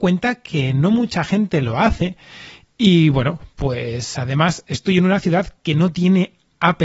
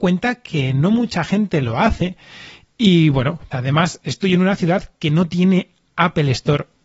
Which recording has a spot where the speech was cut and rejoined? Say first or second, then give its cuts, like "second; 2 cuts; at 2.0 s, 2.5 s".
second; 1 cut; at 3.5 s